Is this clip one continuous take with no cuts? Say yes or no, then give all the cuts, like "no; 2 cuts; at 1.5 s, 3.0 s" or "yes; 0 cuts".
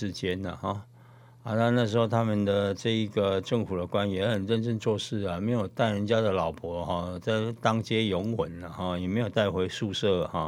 yes; 0 cuts